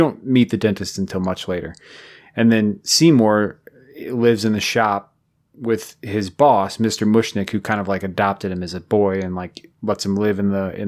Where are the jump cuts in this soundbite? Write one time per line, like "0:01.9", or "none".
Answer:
none